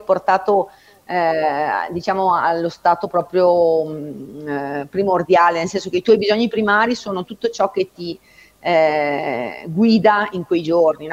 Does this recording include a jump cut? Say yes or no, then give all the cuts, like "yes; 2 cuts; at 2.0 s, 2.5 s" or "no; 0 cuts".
no; 0 cuts